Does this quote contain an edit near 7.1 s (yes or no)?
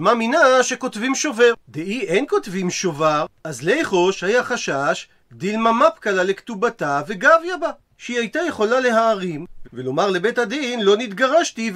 no